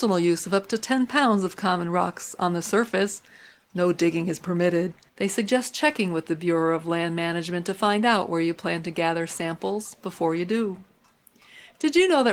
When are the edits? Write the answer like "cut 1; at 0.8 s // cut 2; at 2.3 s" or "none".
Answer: cut 1; at 5.1 s